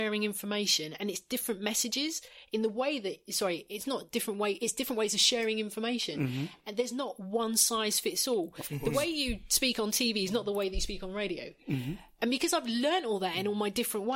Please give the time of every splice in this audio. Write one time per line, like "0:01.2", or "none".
none